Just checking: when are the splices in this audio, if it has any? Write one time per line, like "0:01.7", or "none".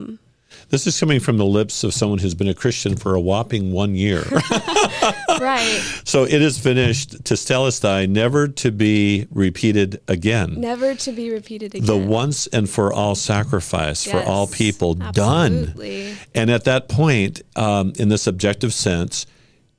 none